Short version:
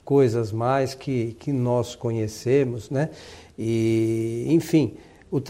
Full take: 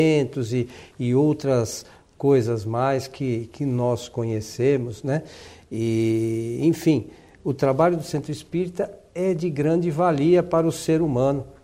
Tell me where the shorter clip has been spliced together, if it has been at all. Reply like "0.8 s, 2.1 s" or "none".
none

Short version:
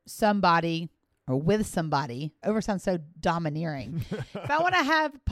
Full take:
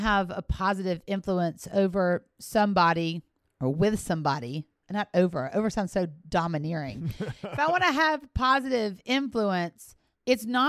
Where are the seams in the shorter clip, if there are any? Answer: 2.4 s

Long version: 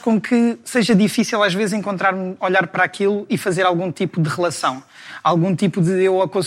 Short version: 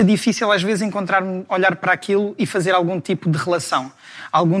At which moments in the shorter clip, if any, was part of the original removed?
none

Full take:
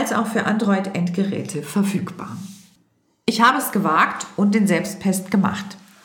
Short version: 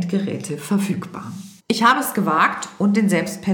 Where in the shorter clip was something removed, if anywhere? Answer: 1.6 s

